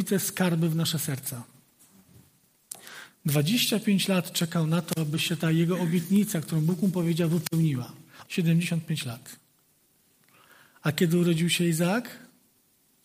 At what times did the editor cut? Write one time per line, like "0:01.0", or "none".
0:03.1
0:08.2